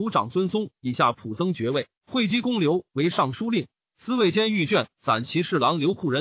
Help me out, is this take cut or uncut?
cut